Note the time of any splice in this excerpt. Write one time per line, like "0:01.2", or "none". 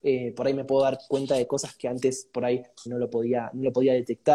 0:02.9